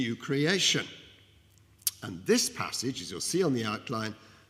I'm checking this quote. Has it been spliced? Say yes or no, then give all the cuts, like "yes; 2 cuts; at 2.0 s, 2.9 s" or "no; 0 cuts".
no; 0 cuts